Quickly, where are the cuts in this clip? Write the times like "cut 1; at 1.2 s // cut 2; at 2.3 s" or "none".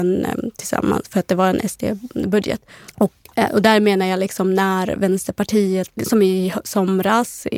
cut 1; at 2.9 s // cut 2; at 6.0 s